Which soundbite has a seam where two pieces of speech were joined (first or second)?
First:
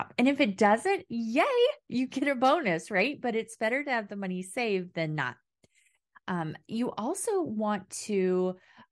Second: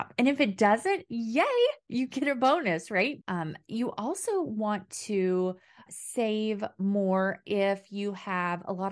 second